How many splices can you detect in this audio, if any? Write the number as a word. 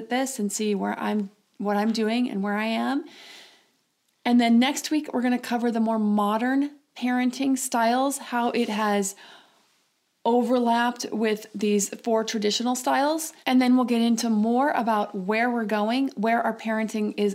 one